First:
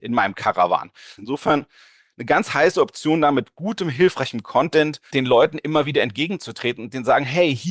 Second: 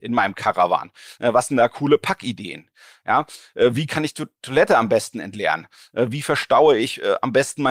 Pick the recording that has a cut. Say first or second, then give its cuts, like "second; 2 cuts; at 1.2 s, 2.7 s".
first; 2 cuts; at 1.2 s, 5.1 s